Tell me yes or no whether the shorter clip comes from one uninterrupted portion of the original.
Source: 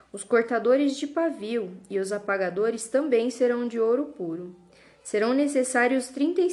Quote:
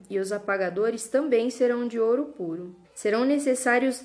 no